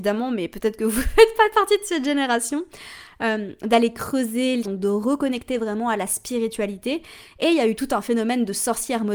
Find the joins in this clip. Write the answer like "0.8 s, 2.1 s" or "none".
4.6 s